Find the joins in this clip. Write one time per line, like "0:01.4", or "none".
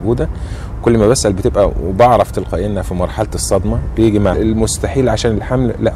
0:04.3

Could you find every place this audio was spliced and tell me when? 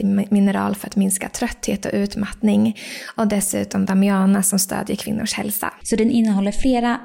0:05.8

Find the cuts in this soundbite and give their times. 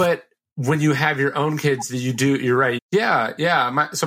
0:02.8

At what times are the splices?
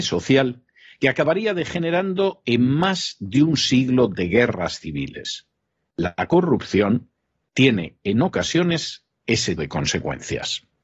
0:09.6

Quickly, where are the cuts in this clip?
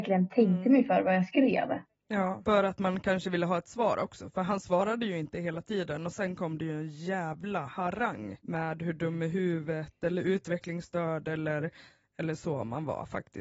none

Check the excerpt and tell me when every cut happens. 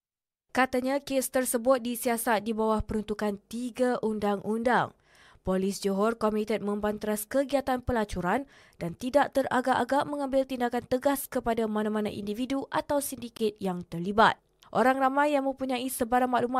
0:14.6

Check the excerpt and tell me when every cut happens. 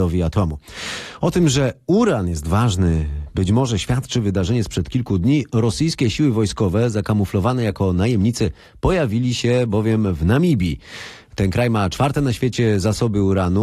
none

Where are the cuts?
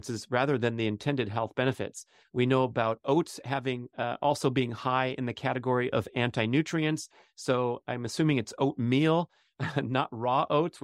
0:02.2

